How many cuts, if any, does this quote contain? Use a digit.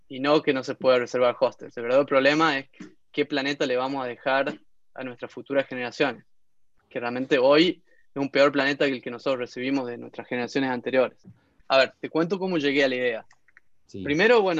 1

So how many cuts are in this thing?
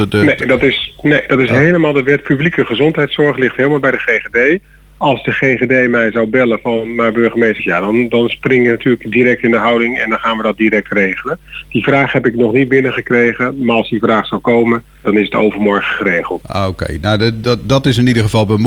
3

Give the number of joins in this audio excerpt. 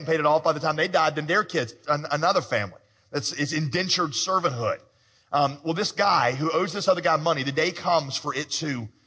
1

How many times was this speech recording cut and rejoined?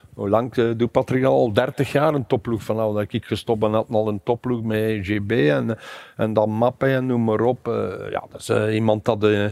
0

